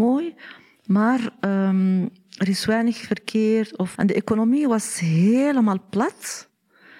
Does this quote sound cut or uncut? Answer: cut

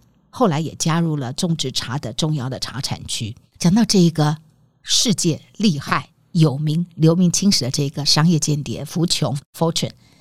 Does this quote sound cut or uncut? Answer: cut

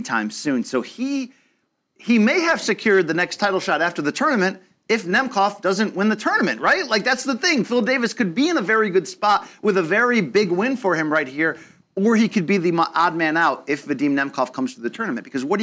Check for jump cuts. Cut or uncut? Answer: uncut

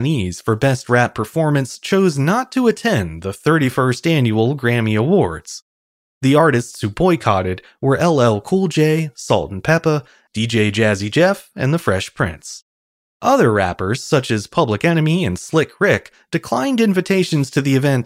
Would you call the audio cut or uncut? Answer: cut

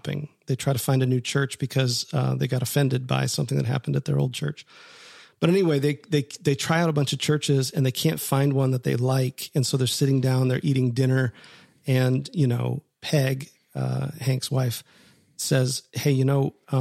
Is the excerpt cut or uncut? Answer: uncut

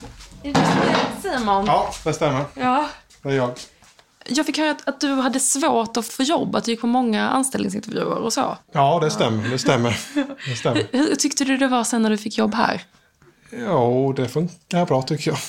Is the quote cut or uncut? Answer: cut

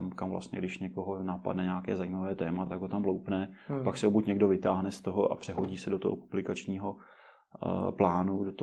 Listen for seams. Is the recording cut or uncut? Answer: uncut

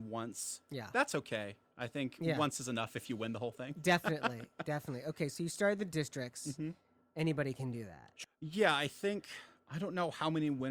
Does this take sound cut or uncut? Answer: cut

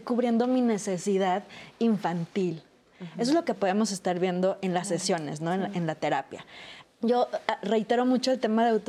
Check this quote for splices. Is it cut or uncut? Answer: cut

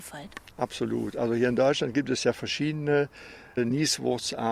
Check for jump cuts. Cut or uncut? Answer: uncut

